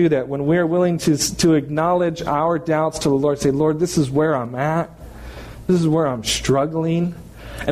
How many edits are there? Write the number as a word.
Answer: zero